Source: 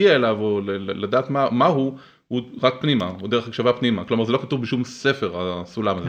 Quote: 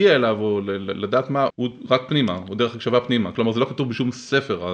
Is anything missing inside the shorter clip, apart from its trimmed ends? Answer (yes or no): yes